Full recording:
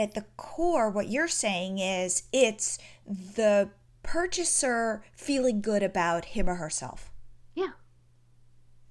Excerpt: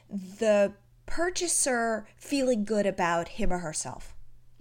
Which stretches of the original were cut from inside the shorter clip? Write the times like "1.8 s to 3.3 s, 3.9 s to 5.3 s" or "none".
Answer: none